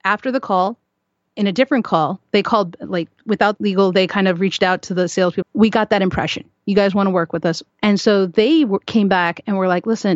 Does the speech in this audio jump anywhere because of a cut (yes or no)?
yes